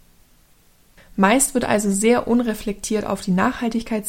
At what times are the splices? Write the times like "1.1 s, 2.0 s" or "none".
none